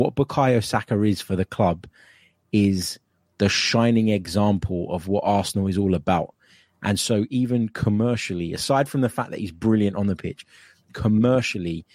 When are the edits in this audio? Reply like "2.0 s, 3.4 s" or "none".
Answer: none